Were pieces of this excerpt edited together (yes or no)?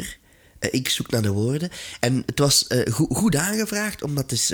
no